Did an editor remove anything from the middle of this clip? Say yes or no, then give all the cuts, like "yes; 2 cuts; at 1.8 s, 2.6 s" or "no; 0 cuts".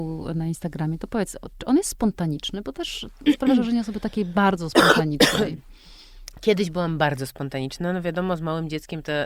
yes; 1 cut; at 1.5 s